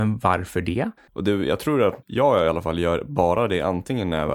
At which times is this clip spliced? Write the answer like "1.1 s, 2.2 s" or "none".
1.1 s